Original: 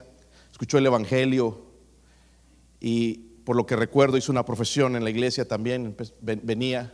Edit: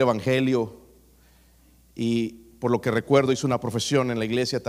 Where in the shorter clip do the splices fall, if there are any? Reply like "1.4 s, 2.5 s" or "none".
none